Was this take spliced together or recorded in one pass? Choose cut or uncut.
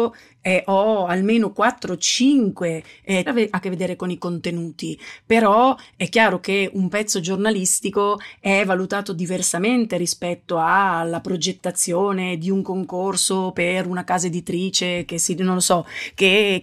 cut